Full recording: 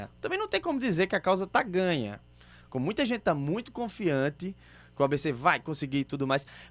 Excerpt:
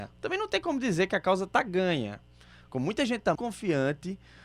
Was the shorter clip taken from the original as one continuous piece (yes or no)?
no